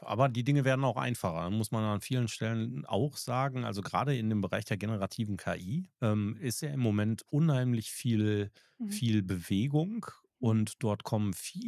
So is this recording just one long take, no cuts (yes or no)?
no